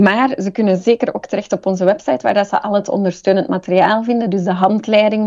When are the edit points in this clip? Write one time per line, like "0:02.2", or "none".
none